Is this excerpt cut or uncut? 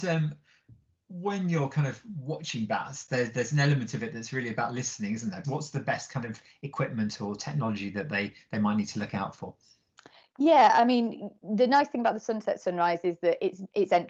cut